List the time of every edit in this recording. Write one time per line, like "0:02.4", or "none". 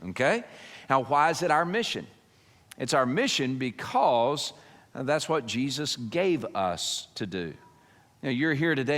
none